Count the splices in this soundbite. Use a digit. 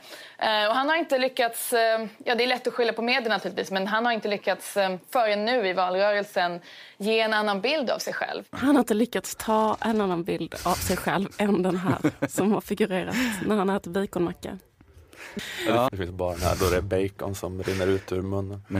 2